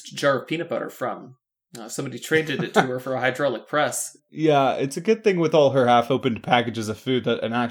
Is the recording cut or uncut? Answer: uncut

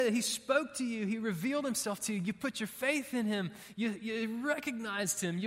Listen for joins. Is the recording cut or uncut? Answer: uncut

